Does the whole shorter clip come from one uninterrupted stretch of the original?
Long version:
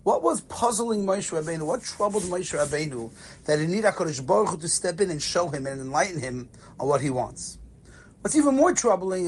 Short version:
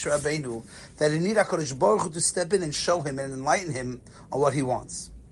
yes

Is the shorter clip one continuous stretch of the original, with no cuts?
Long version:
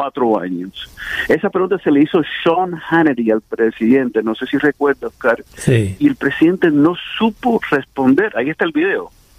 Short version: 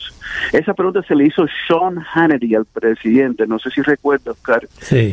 yes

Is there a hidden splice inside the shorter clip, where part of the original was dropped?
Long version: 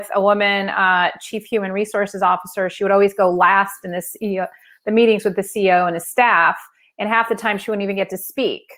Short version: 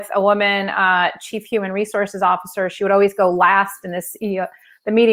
no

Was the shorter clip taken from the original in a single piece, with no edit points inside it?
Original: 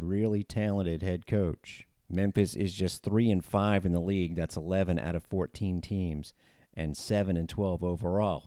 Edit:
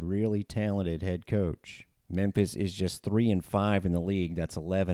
yes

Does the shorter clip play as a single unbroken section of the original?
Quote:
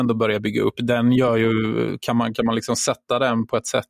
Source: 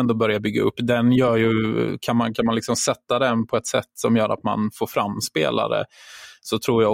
yes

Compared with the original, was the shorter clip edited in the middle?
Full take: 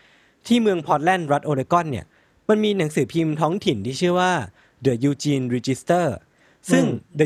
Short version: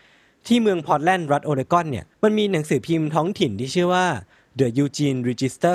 yes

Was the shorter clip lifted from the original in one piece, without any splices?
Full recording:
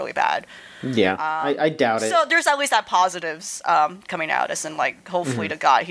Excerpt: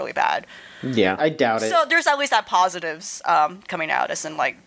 no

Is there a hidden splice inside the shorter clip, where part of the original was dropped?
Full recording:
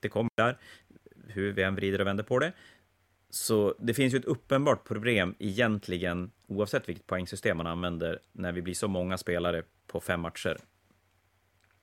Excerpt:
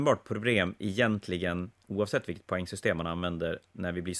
no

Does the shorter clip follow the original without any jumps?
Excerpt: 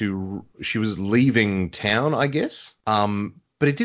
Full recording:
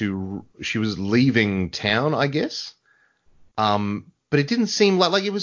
no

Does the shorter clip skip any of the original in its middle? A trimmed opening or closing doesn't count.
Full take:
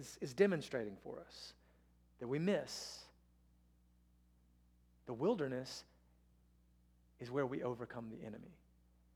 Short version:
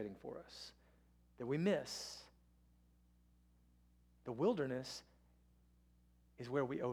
no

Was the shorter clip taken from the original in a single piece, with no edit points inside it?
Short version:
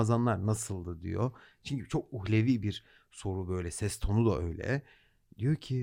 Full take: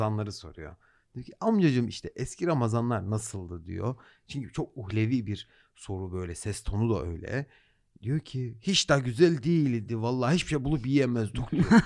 yes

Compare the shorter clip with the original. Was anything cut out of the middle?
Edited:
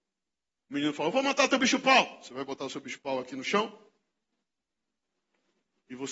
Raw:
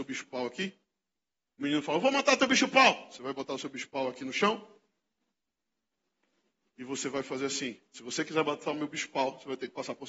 no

